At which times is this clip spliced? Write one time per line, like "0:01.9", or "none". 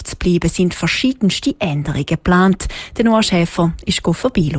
none